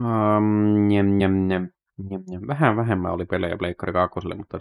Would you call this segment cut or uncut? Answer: uncut